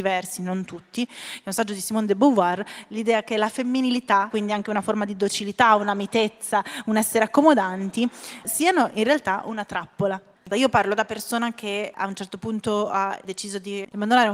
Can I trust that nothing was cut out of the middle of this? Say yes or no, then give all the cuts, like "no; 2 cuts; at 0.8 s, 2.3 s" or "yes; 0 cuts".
no; 2 cuts; at 8.4 s, 10.4 s